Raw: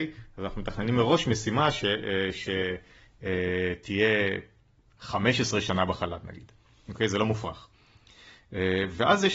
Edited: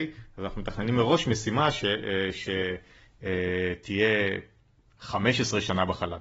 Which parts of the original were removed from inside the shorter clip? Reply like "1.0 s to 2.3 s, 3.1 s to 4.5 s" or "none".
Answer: none